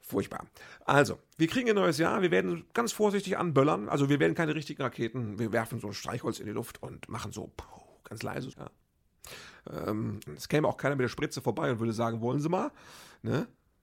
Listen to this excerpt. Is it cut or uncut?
cut